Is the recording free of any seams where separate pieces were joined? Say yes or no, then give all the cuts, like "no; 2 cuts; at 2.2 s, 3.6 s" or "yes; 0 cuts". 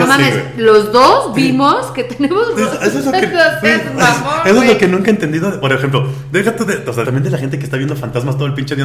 no; 1 cut; at 7.0 s